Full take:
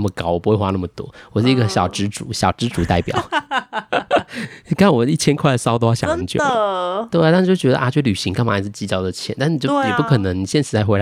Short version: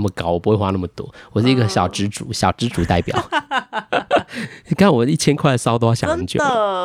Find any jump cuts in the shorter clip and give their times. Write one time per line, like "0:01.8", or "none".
none